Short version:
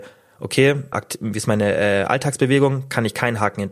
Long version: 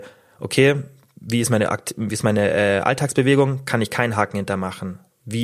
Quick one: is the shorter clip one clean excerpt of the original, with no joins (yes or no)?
no